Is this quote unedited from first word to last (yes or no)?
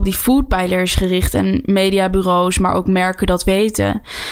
yes